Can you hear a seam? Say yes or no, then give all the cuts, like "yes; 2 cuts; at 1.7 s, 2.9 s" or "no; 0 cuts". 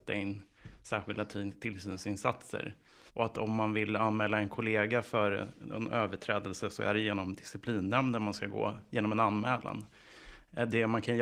yes; 1 cut; at 3.1 s